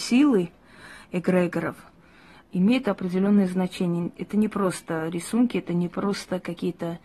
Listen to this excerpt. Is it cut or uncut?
uncut